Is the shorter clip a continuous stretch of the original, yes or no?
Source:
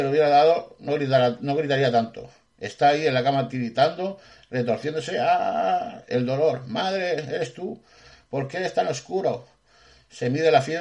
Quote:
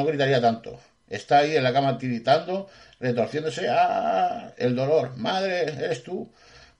yes